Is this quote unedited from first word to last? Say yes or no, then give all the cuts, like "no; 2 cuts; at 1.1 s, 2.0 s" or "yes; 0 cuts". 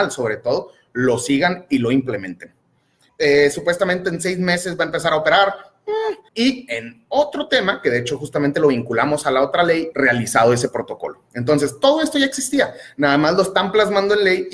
no; 3 cuts; at 3.1 s, 6.3 s, 9.9 s